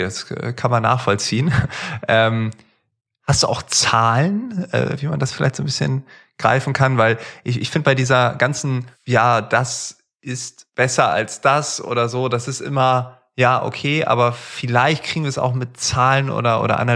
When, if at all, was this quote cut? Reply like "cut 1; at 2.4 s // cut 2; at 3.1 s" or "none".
none